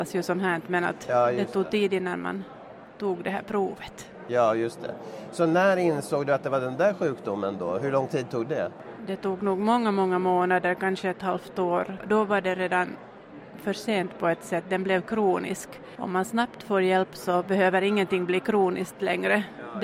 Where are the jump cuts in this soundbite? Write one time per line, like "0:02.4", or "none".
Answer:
none